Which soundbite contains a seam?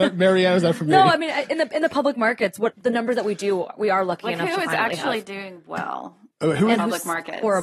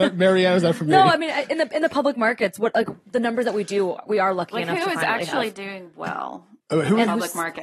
first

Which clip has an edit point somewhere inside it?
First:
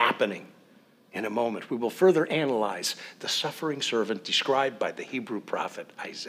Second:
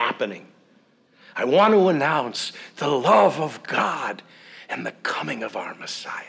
first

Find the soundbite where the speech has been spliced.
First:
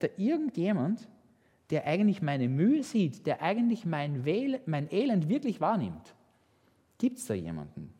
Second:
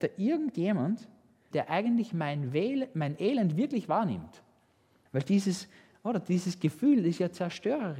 second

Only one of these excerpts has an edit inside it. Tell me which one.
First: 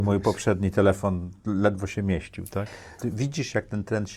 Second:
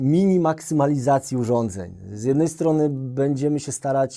first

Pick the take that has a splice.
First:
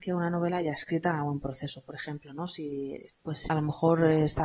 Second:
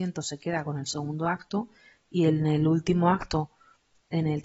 first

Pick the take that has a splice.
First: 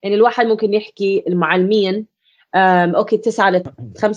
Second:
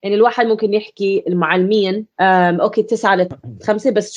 second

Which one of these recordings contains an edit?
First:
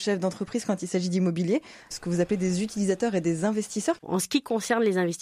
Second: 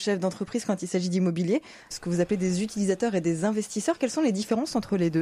first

